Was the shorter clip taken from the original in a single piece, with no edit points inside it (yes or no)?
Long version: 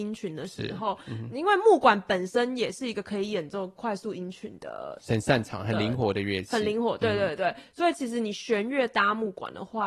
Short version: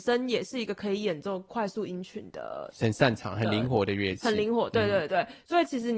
yes